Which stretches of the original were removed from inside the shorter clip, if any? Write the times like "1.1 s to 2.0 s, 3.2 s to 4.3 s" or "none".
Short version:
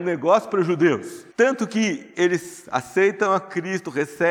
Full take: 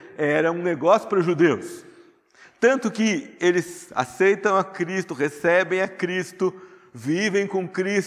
1.9 s to 2.5 s